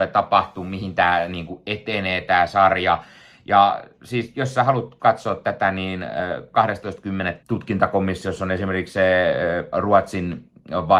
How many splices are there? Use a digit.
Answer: 2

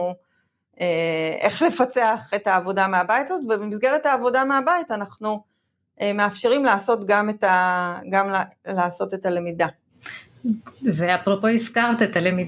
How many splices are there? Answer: 0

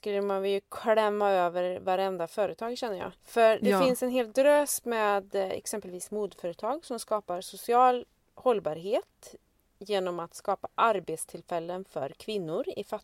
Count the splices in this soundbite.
1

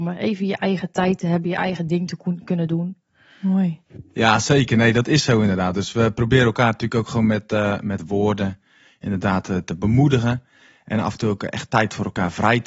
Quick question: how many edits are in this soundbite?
1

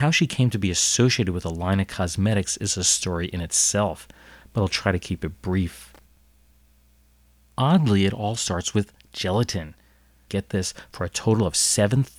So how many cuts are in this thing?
1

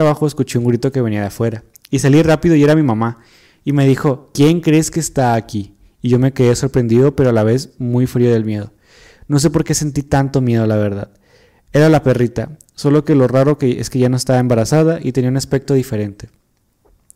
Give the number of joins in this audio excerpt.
0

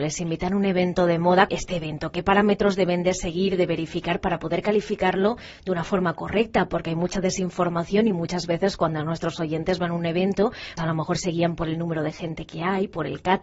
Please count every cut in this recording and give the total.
2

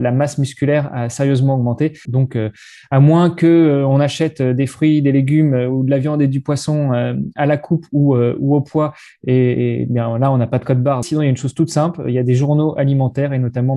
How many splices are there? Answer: 2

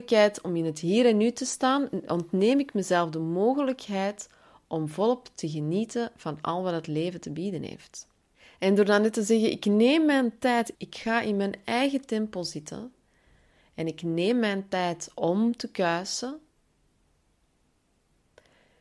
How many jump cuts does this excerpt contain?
1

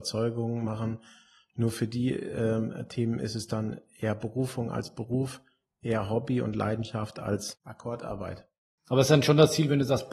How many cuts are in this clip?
0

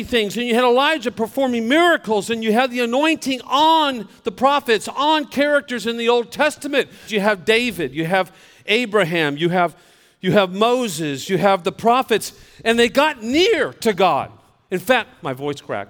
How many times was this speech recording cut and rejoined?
1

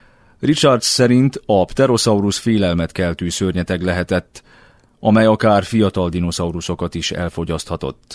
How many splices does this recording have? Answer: 0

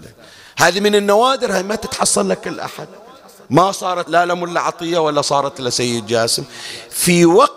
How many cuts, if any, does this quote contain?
1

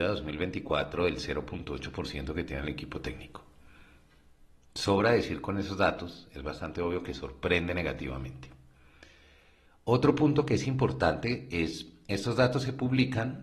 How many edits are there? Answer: 0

